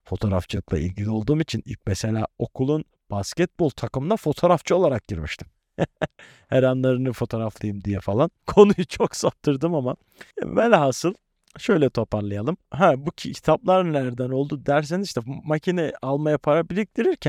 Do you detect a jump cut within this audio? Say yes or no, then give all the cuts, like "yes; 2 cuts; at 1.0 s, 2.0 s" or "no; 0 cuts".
yes; 1 cut; at 8.4 s